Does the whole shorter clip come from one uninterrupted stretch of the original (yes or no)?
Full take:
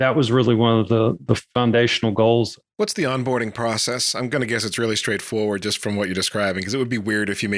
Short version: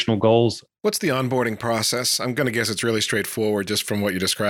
yes